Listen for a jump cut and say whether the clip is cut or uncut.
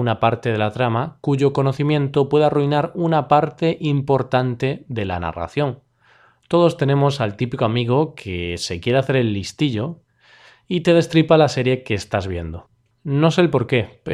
uncut